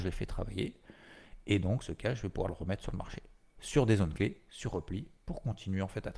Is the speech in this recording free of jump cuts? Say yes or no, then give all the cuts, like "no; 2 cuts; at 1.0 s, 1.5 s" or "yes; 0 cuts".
yes; 0 cuts